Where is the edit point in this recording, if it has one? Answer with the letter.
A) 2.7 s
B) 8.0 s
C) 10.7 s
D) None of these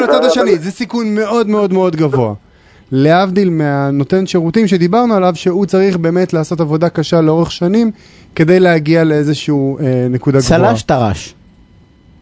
A